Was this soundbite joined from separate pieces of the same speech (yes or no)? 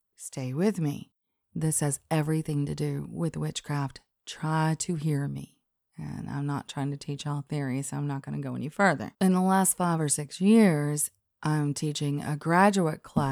yes